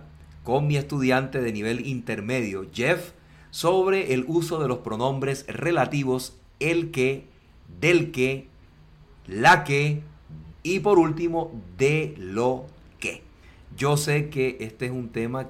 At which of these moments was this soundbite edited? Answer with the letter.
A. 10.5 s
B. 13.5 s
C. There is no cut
A